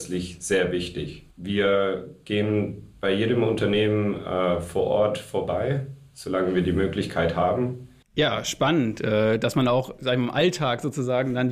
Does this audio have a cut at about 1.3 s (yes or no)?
yes